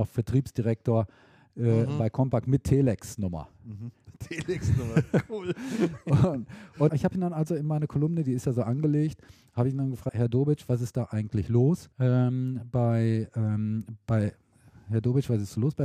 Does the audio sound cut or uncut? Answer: cut